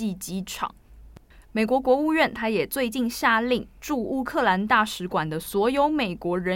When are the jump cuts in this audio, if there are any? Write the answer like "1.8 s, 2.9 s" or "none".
1.4 s